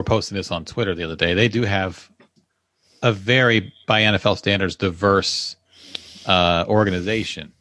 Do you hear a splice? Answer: no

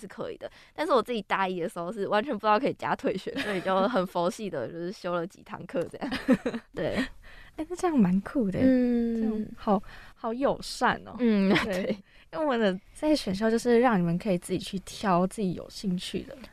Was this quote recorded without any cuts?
no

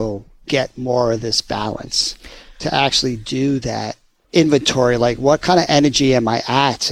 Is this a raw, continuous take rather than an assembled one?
yes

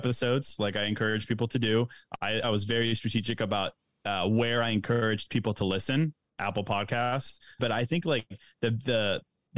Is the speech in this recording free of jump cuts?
no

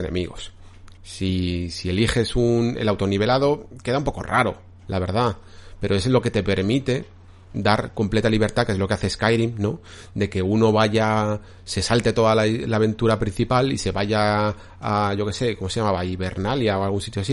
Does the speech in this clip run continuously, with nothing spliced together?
no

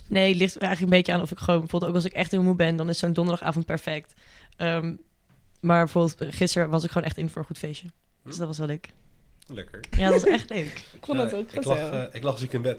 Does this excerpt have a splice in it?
yes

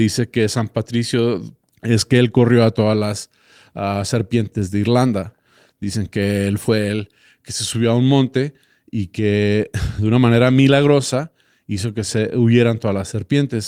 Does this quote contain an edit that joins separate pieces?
yes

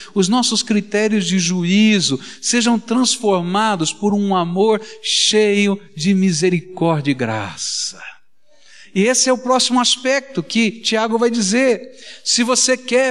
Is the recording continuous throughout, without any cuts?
yes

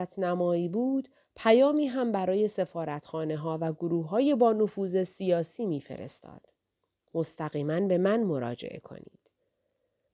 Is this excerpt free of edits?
yes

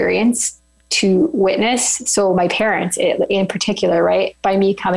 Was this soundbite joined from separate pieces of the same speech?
no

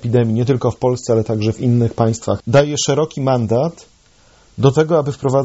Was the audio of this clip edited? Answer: yes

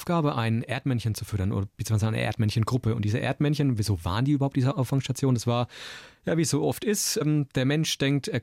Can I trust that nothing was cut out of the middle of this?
yes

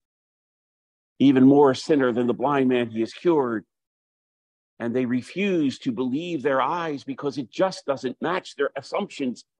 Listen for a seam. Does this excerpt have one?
no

